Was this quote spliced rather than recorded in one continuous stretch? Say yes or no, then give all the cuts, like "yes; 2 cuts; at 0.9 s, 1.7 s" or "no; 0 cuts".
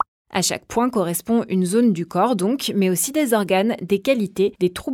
no; 0 cuts